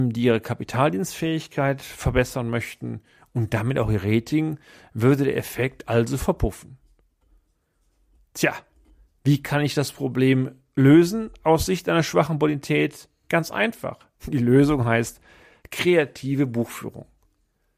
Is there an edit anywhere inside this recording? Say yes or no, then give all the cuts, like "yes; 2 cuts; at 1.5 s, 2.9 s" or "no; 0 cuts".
no; 0 cuts